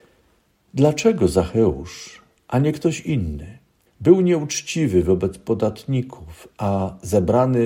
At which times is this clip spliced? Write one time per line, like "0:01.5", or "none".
0:03.9